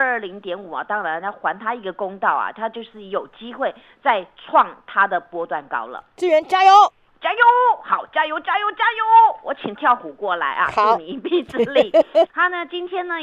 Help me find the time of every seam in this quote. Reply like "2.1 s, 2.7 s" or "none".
9.8 s, 12.3 s